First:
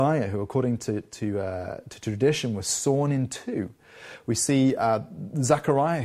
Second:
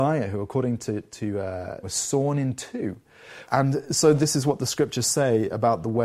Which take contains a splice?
second; 2 cuts; at 1.8 s, 3.4 s

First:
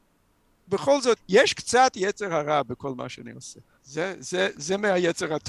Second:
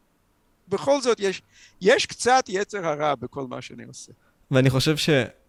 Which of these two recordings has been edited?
first; 2 cuts; at 1.2 s, 3.8 s

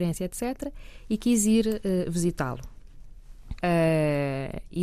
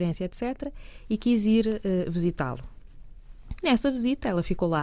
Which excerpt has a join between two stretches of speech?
first; 1 cut; at 3.6 s

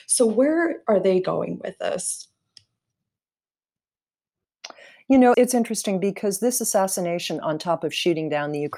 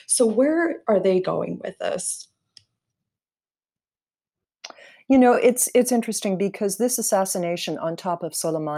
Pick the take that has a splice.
first; 2 cuts; at 5.3 s, 7.4 s

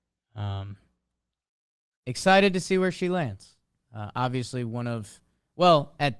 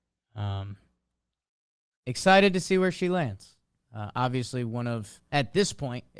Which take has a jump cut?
second; 1 cut; at 5.3 s

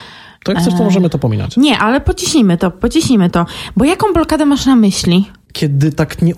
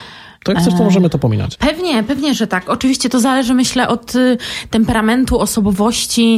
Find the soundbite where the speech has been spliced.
second; 1 cut; at 1.5 s

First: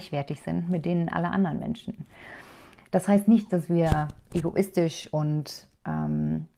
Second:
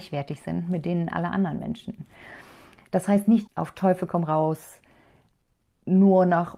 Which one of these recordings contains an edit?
second; 1 cut; at 3.5 s

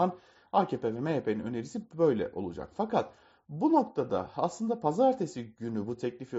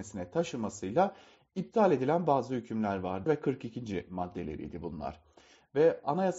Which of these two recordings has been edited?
second; 1 cut; at 3.3 s

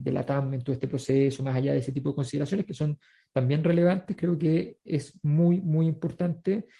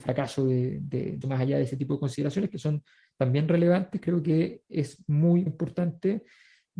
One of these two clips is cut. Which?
second; 2 cuts; at 1.2 s, 5.5 s

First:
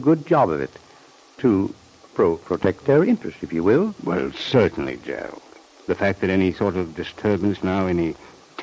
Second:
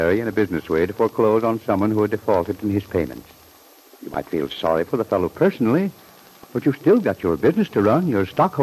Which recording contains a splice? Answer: first; 2 cuts; at 5.8 s, 7.6 s

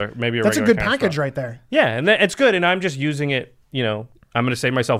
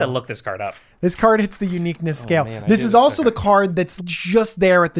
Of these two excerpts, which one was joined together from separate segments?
second; 1 cut; at 4.0 s

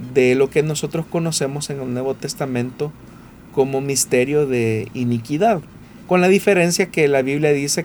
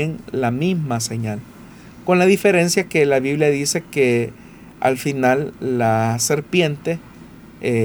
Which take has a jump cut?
first; 1 cut; at 6.1 s

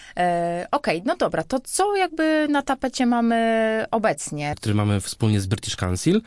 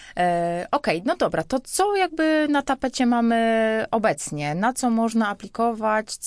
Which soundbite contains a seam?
first; 1 cut; at 4.5 s

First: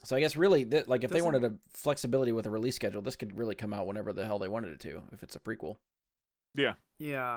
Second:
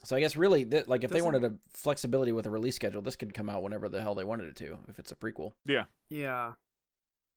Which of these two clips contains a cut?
second; 2 cuts; at 3.3 s, 5.6 s

